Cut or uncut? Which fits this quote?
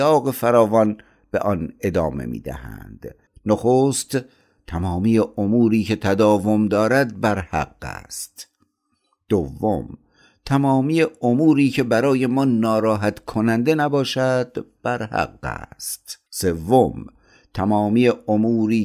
cut